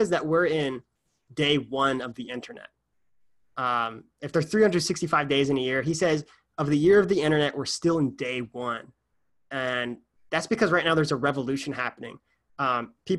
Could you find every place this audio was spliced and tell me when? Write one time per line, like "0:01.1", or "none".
none